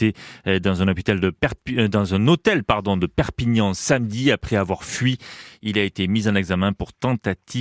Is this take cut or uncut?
uncut